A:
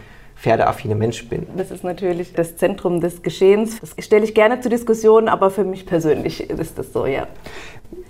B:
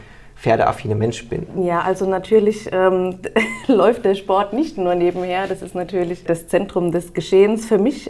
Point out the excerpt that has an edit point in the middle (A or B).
A